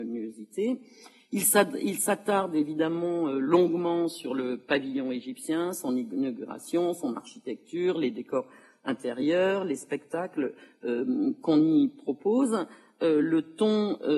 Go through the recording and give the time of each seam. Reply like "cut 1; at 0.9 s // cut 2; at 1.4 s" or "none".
none

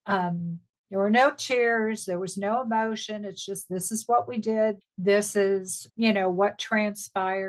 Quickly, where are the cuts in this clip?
cut 1; at 4.8 s // cut 2; at 5.9 s

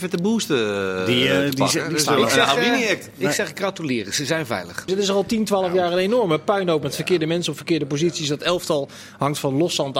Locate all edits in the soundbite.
cut 1; at 4.9 s

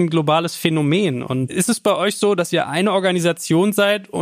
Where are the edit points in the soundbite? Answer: none

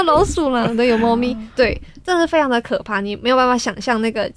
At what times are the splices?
cut 1; at 1.6 s

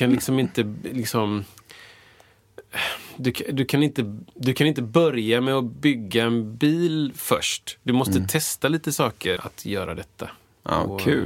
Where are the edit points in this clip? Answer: cut 1; at 4.3 s // cut 2; at 9.4 s

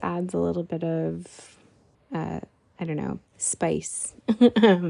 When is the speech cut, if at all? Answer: cut 1; at 1.9 s // cut 2; at 3.3 s

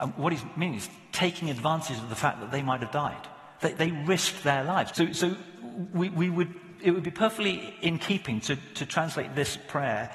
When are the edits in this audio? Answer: cut 1; at 4.9 s

